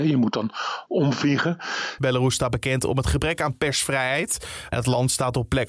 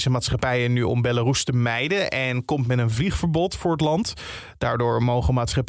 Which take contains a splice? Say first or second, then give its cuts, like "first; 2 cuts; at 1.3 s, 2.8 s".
first; 1 cut; at 2.0 s